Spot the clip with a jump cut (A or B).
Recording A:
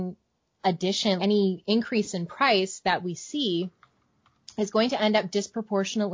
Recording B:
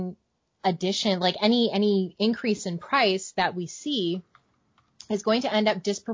A